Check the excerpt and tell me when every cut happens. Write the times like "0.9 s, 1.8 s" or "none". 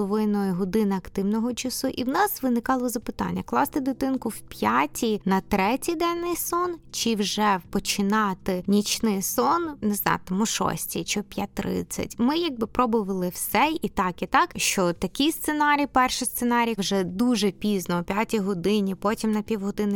14.5 s, 16.8 s